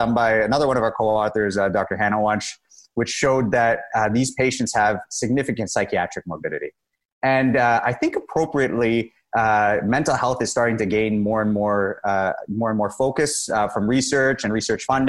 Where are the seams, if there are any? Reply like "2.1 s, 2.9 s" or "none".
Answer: none